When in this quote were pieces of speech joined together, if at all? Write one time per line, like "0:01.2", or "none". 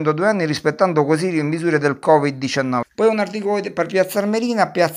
0:02.8